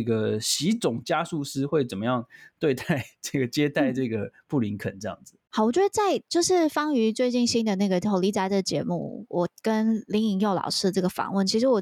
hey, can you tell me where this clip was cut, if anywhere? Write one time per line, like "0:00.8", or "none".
0:05.4